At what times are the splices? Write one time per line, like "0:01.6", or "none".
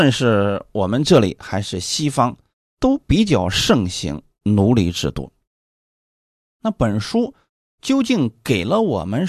0:06.5

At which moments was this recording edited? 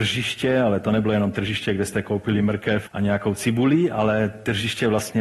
0:02.9

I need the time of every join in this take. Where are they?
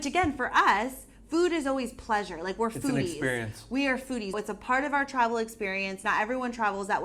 0:04.3

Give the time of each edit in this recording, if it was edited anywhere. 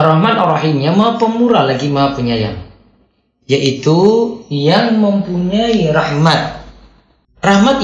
none

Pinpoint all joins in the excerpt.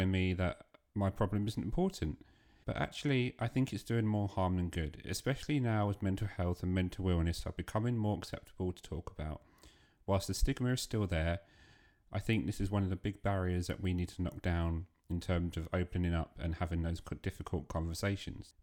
0:02.6

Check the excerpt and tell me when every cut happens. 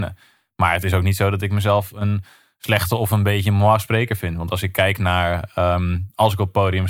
none

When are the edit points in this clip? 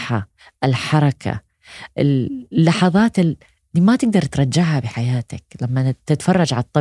0:01.9

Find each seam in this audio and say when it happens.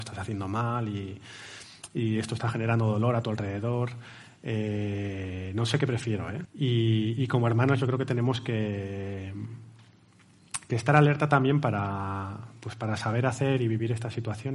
0:06.5

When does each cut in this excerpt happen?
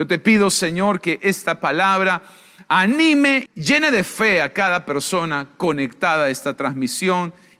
0:03.5

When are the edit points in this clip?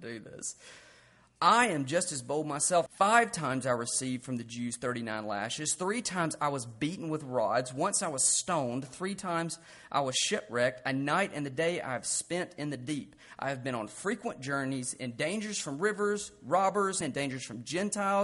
0:02.9
0:17.0

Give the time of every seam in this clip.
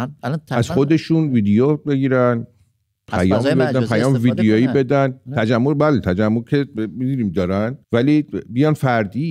0:07.8

